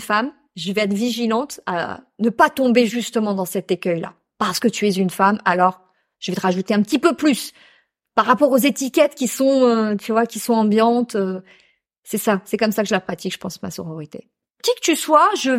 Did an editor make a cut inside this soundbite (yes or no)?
yes